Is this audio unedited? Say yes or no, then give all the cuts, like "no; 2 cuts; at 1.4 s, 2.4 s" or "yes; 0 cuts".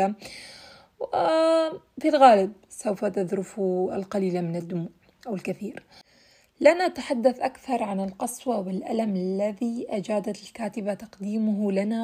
yes; 0 cuts